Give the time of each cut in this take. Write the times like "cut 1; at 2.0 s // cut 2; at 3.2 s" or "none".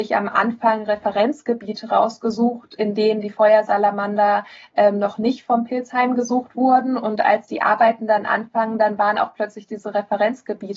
none